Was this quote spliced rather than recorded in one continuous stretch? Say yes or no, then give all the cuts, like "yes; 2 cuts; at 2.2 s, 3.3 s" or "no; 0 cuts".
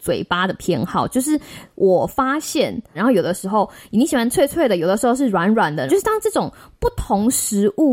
yes; 2 cuts; at 2.9 s, 5.9 s